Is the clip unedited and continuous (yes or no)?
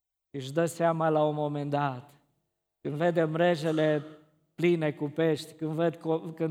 yes